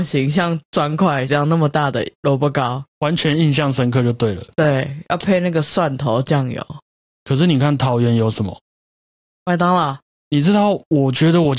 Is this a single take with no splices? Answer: yes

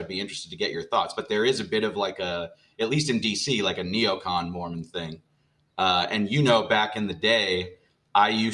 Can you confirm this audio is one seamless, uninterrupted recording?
yes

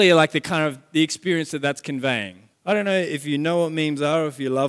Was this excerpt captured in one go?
no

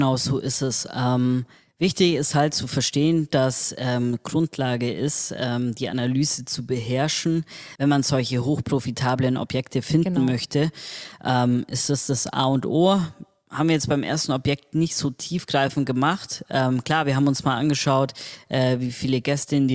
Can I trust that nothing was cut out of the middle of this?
yes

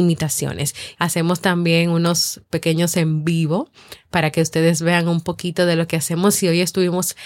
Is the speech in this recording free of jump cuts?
no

